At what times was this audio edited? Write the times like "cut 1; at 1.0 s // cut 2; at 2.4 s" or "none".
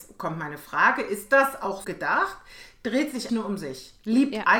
cut 1; at 1.8 s // cut 2; at 3.3 s